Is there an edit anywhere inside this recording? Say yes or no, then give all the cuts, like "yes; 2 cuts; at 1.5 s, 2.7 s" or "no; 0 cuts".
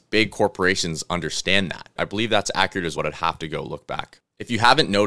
yes; 2 cuts; at 2.0 s, 3.0 s